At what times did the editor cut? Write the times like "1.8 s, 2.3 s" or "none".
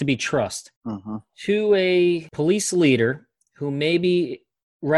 none

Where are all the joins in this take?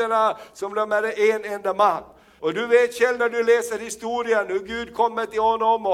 2.4 s

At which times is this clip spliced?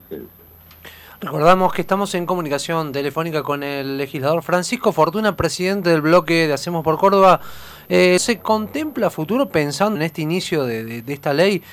8.2 s, 10.0 s

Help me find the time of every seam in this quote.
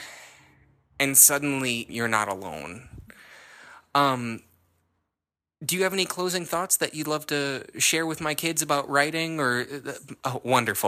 1.9 s

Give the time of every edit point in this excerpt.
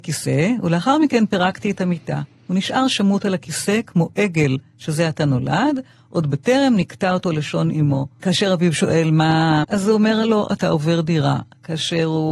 8.2 s, 9.6 s

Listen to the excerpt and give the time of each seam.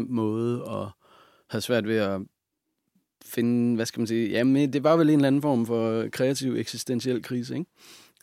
none

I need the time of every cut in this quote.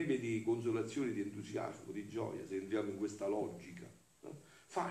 none

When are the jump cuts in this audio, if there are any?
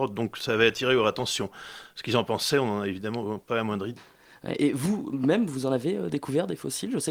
4.0 s

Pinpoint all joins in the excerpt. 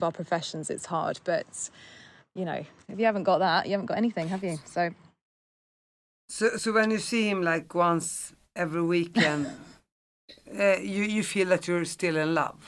none

